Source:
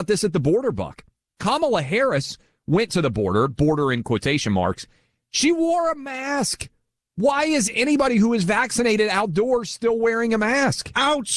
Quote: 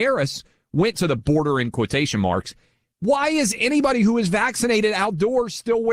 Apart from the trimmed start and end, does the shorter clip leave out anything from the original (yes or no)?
yes